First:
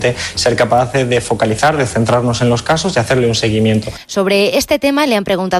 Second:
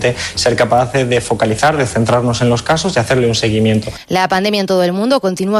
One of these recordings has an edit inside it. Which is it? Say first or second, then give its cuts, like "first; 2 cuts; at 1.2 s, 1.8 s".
first; 1 cut; at 4.0 s